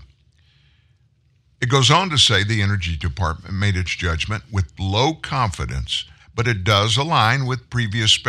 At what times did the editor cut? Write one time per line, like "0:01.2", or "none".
0:01.5
0:06.2